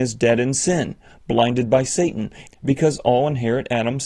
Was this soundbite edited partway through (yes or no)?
yes